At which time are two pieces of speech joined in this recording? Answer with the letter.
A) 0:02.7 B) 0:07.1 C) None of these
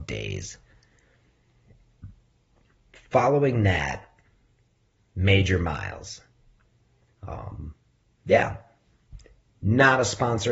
B